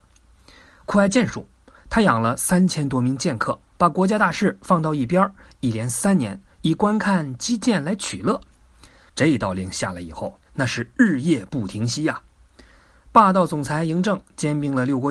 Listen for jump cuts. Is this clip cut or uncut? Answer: cut